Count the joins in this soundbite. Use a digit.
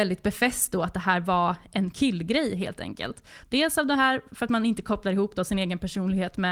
1